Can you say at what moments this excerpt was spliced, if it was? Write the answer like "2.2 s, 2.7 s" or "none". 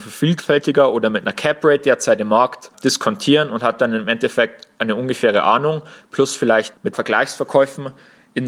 none